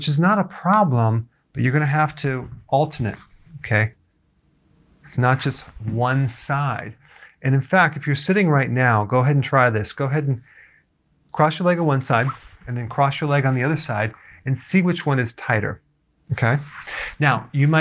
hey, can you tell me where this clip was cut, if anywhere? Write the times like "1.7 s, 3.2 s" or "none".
16.2 s